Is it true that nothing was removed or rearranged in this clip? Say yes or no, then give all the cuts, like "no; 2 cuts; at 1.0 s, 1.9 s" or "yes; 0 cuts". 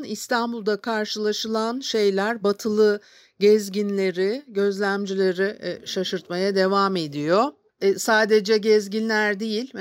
no; 1 cut; at 7.7 s